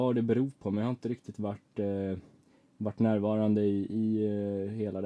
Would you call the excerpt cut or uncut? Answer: uncut